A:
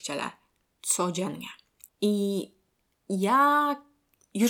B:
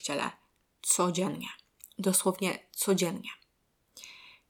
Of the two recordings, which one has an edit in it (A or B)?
A